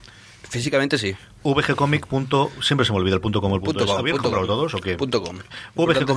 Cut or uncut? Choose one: uncut